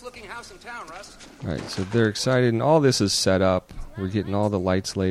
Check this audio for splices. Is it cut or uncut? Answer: uncut